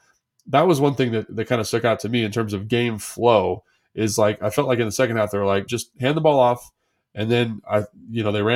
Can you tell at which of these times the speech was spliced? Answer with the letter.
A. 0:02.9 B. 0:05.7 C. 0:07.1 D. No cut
B